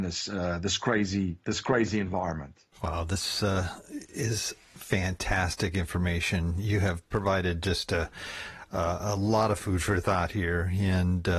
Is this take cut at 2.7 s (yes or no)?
yes